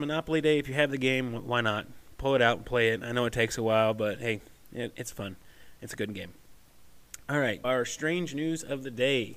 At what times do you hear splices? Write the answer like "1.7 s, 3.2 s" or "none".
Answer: 7.6 s